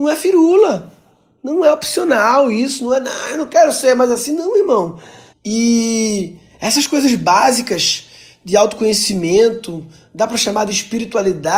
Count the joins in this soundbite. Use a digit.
1